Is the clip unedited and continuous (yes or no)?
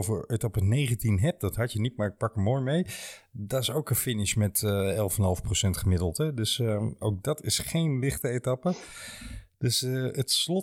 yes